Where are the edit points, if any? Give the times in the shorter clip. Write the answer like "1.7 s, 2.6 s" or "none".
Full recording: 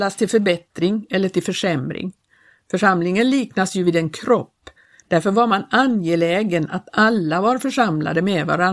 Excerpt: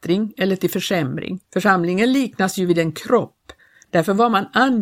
1.4 s